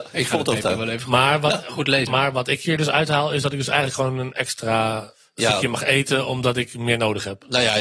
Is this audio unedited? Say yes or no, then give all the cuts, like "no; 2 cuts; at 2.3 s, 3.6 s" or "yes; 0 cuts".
yes; 0 cuts